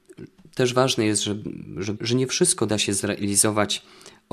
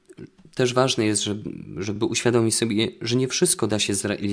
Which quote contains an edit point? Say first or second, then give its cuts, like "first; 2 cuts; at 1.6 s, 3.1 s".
first; 1 cut; at 2.0 s